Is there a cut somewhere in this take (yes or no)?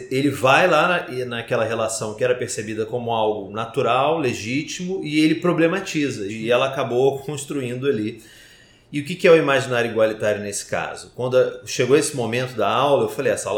yes